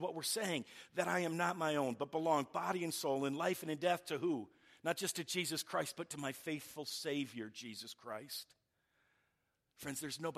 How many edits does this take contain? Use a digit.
0